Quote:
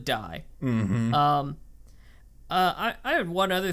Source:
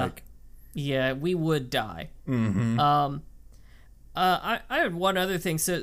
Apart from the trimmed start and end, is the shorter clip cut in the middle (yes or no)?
no